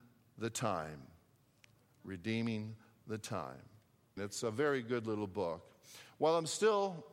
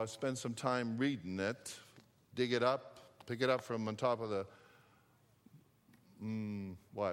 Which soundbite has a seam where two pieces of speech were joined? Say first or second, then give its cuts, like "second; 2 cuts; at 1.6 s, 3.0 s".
first; 1 cut; at 4.2 s